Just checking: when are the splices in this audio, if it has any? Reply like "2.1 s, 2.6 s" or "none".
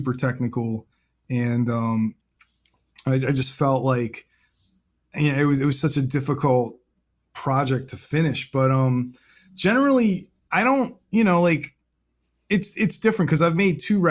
none